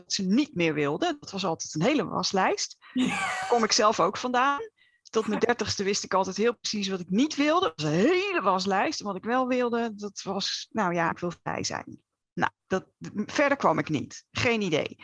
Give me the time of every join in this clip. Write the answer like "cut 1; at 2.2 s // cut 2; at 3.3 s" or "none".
cut 1; at 11.1 s